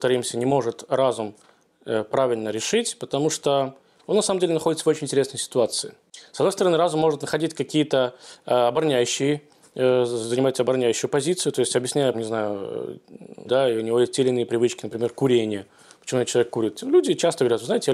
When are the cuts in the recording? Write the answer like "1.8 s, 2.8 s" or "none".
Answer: 12.1 s, 13.5 s